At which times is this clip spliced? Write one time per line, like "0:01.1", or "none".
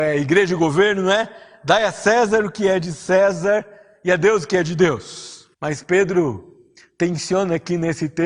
0:05.5